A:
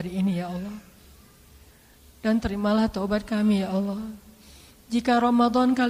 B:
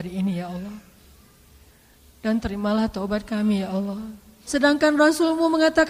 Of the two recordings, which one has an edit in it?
B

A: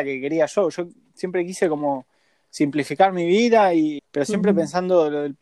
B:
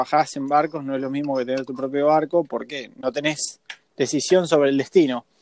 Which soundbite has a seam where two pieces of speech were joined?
A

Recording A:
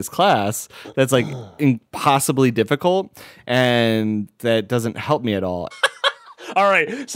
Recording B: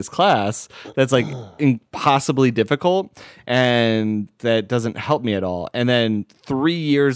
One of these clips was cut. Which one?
A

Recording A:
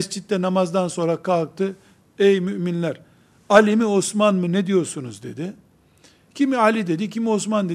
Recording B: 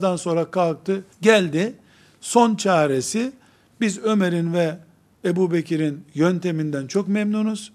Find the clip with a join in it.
B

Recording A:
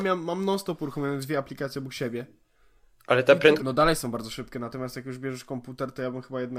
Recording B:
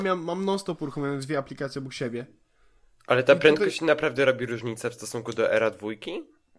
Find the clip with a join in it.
A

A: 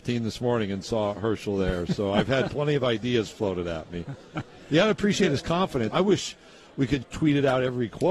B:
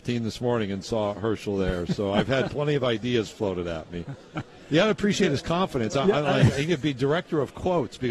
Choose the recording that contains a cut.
A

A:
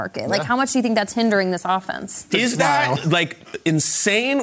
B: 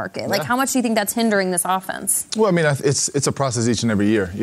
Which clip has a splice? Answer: A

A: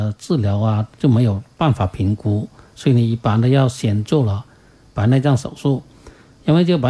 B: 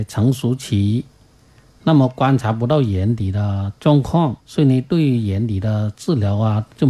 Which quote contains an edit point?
B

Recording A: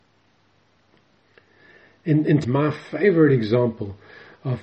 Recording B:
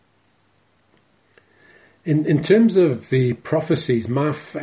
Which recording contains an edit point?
A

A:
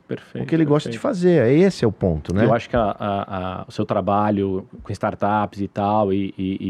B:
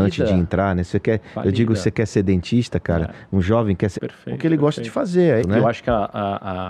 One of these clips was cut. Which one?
B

